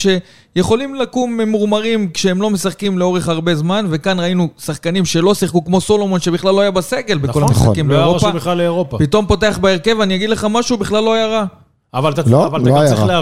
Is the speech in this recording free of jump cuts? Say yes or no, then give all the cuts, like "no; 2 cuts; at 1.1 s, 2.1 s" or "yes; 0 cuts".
yes; 0 cuts